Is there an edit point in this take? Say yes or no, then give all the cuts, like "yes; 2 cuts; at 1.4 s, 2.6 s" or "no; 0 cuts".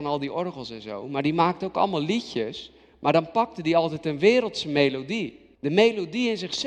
yes; 1 cut; at 5.5 s